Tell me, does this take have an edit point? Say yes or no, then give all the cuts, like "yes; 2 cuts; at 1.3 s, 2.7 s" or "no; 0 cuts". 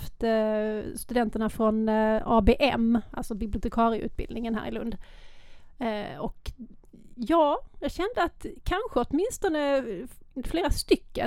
no; 0 cuts